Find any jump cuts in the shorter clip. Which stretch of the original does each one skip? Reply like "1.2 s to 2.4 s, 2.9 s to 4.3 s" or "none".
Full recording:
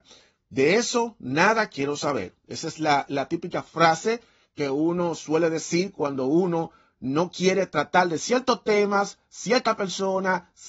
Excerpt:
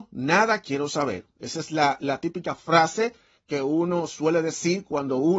none

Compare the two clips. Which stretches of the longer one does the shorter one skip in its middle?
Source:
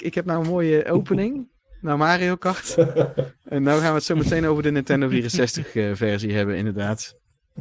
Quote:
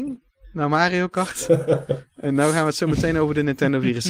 none

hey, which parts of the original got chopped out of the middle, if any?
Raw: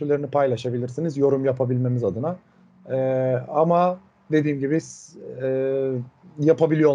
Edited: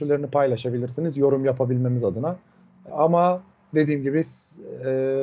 2.9 s to 3.5 s

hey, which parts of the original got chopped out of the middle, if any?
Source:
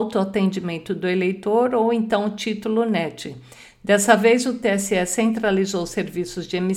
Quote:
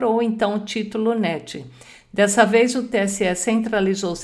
none

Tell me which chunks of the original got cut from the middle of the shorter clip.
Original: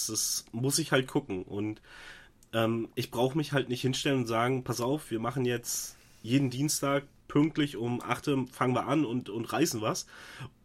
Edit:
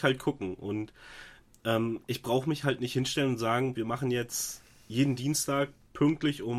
4.6 s to 5.1 s

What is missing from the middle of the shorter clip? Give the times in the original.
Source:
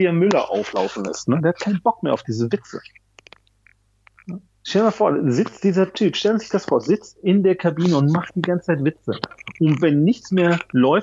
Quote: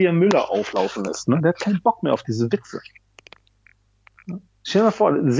none

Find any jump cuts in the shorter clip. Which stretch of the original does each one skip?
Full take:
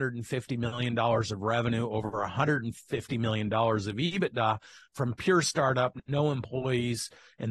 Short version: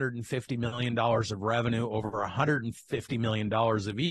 none

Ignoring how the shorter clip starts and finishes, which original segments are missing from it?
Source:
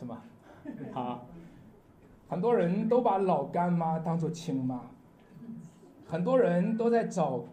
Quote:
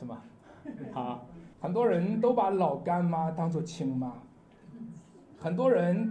1.5 s to 2.2 s

